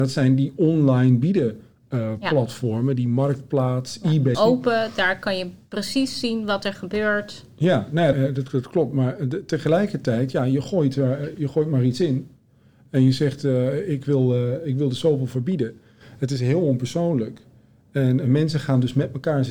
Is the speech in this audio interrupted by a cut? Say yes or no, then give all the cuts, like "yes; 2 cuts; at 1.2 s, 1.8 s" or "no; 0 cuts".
yes; 2 cuts; at 4.3 s, 8.1 s